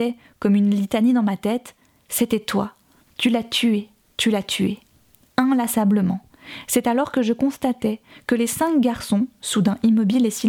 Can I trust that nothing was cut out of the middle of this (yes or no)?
no